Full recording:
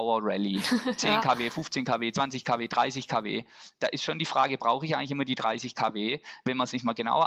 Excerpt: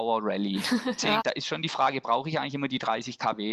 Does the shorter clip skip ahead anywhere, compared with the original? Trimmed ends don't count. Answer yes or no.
yes